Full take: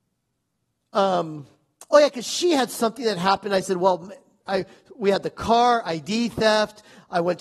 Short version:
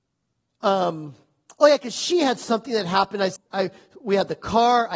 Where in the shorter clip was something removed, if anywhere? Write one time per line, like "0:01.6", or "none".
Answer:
0:03.4